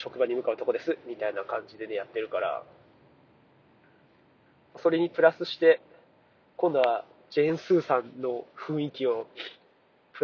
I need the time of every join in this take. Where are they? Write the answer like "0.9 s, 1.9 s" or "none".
none